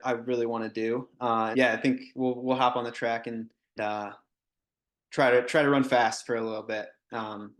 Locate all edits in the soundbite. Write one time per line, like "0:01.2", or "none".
0:01.5
0:03.8